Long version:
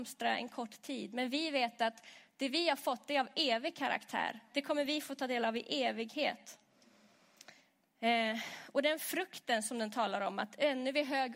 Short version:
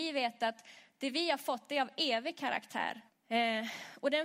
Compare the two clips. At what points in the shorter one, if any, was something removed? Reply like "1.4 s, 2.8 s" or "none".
3.1 s